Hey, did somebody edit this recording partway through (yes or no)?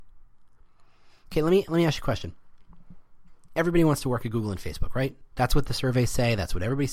no